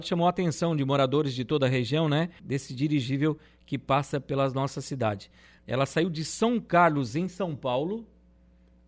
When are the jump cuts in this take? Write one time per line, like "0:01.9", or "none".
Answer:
0:02.4
0:05.6